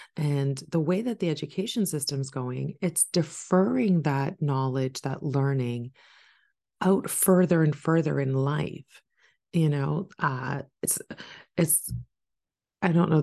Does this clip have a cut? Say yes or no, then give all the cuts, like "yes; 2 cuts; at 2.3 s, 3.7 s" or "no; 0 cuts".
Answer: no; 0 cuts